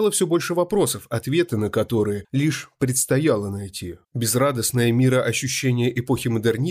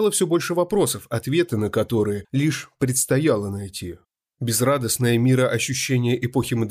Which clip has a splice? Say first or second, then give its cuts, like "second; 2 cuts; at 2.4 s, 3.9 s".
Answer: first; 1 cut; at 4.1 s